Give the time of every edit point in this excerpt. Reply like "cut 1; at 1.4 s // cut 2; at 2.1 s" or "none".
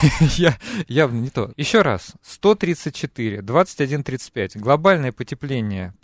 cut 1; at 1.5 s